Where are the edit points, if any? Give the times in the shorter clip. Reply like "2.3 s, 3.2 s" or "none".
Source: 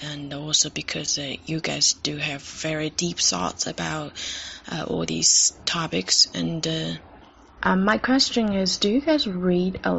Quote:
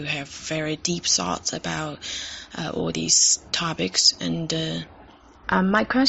none